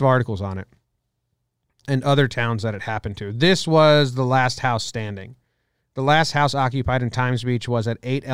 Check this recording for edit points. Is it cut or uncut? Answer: uncut